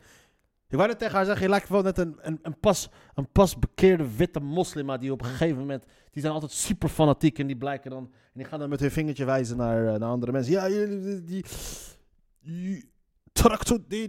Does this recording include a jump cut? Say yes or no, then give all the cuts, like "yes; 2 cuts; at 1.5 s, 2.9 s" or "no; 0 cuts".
no; 0 cuts